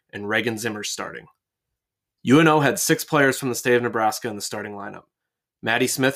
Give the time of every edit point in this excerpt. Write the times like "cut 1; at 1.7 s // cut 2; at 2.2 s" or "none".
cut 1; at 2.2 s